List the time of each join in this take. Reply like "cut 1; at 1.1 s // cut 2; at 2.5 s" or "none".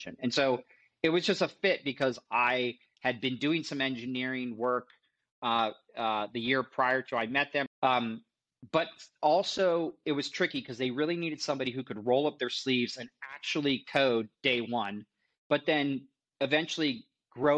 cut 1; at 7.7 s

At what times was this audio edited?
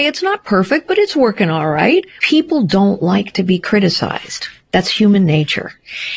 cut 1; at 2.2 s

